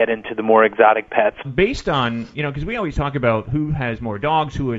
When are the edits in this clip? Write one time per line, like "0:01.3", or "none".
0:01.4